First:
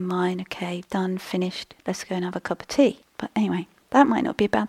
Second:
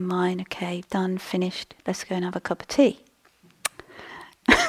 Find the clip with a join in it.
first; 1 cut; at 3.0 s

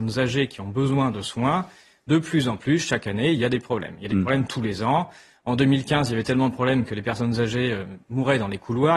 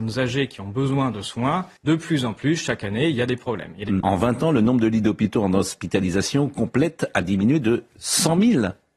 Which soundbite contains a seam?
second; 2 cuts; at 1.8 s, 4.0 s

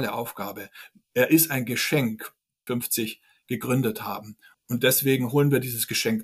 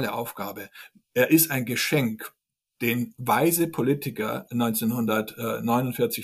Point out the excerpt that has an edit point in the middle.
first; 2 cuts; at 2.7 s, 4.5 s

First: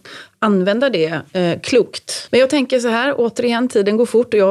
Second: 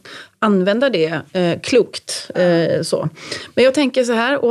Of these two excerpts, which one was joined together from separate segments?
first; 1 cut; at 2.3 s

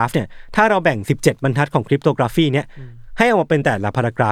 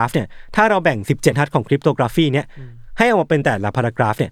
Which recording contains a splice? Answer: second; 1 cut; at 1.3 s

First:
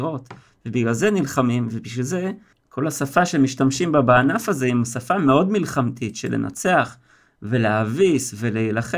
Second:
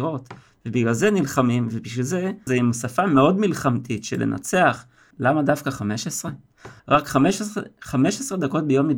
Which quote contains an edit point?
second; 3 cuts; at 2.5 s, 5.1 s, 6.8 s

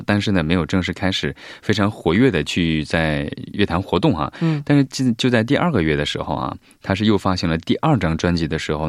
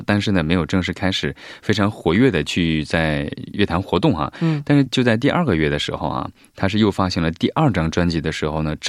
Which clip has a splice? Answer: second; 1 cut; at 4.9 s

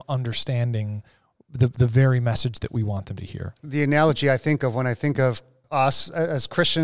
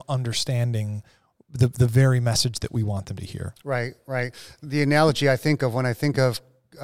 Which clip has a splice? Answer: first; 2 cuts; at 3.6 s, 5.6 s

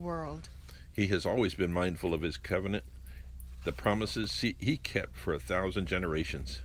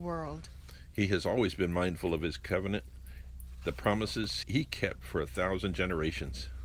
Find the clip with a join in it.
second; 1 cut; at 4.4 s

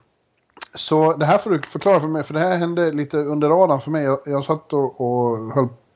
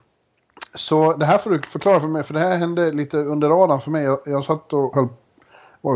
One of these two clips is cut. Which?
second; 1 cut; at 4.9 s

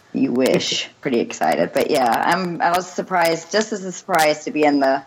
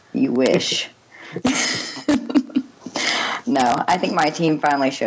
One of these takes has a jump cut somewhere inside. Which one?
first; 1 cut; at 1.0 s

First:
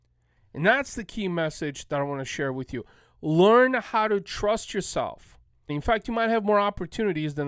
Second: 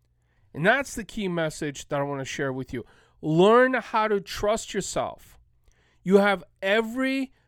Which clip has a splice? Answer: first; 1 cut; at 5.7 s

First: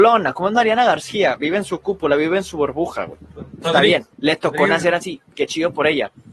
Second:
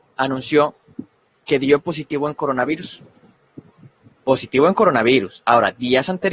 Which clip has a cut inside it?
first; 1 cut; at 4.1 s

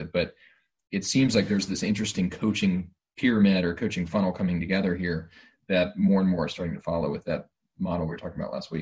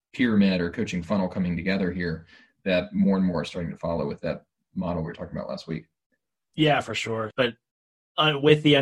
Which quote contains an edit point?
second; 1 cut; at 7.3 s

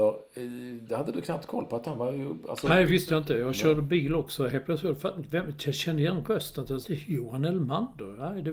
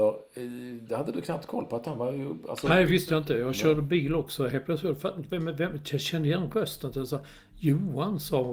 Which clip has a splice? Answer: first; 2 cuts; at 5.3 s, 6.8 s

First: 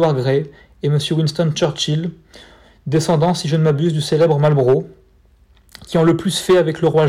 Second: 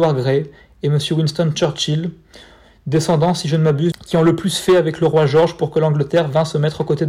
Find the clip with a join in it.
second; 1 cut; at 3.9 s

